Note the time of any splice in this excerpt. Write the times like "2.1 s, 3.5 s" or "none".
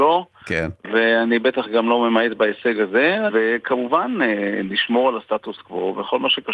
3.3 s